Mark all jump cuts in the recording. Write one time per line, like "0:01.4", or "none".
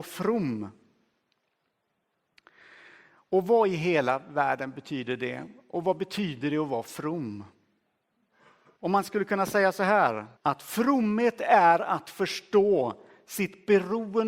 0:08.8
0:10.4